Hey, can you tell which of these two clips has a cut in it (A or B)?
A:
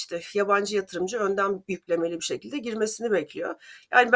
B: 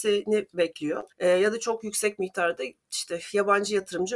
B